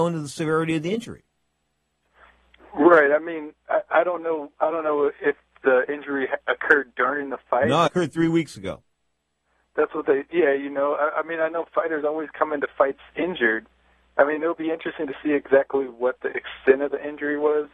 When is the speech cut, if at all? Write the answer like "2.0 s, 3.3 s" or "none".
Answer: 7.9 s